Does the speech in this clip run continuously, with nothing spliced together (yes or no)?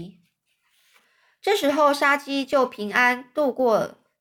yes